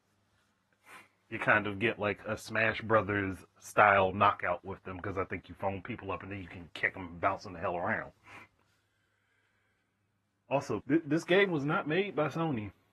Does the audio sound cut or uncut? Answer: cut